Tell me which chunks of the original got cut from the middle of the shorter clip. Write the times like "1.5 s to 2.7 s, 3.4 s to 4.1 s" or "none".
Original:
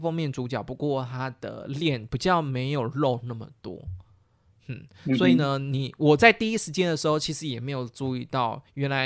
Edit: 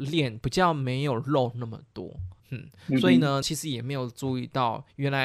4.1 s to 4.6 s, 5.6 s to 7.2 s